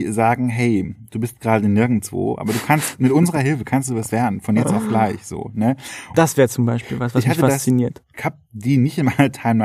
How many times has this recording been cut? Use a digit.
2